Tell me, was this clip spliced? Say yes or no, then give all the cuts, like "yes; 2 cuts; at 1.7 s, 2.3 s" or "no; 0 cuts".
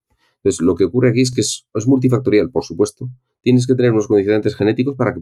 no; 0 cuts